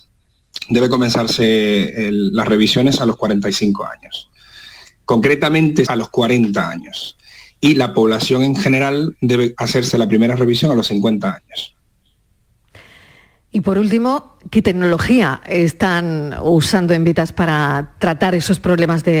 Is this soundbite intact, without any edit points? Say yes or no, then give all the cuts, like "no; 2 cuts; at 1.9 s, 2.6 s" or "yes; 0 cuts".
no; 1 cut; at 5.9 s